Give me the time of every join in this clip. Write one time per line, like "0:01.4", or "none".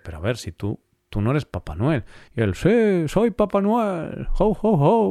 none

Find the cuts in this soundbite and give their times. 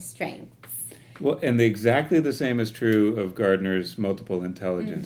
none

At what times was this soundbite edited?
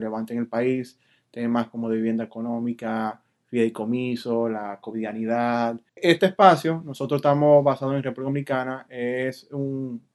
0:05.9

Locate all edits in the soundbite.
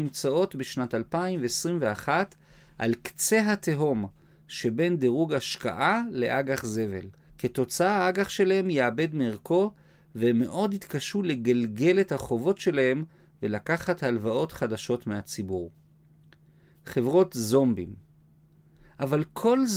0:07.3

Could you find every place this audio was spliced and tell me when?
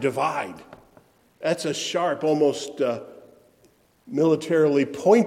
none

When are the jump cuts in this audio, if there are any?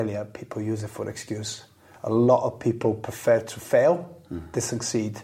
none

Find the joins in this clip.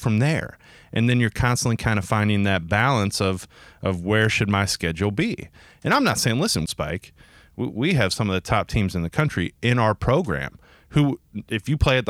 0:06.7

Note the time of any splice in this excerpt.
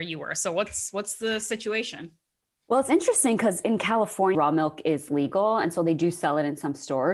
0:04.3

